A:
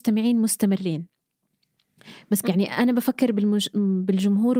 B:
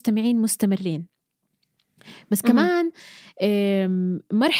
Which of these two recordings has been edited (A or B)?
A